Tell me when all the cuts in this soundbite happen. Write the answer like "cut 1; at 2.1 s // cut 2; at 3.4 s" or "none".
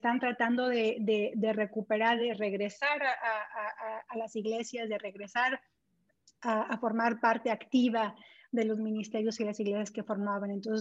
none